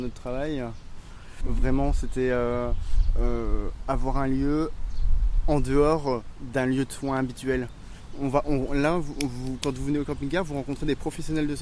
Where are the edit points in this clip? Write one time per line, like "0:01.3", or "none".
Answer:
0:01.4